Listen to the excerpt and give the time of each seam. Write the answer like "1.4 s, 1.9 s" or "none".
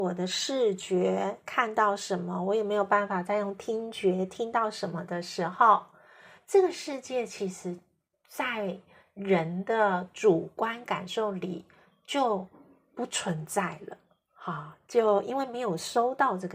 none